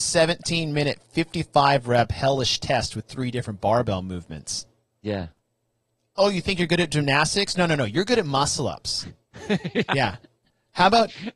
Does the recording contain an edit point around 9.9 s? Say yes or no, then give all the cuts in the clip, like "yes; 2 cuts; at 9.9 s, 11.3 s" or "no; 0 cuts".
yes; 1 cut; at 9.9 s